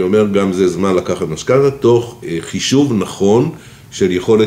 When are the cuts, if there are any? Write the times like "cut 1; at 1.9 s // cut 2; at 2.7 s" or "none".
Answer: cut 1; at 2.2 s